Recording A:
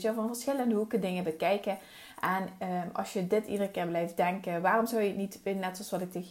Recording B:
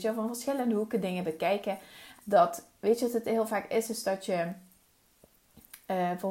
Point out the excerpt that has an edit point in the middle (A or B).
B